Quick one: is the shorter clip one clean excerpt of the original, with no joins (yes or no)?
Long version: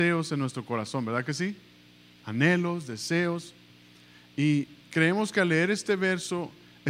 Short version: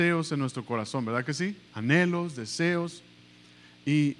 no